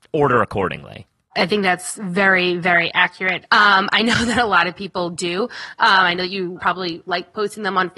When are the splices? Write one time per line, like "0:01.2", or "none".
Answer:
0:03.5